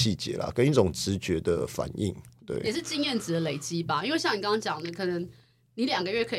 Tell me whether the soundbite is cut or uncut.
uncut